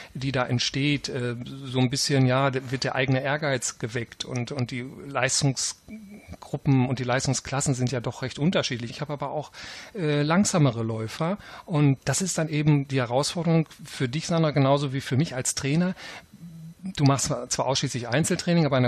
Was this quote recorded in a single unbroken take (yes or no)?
no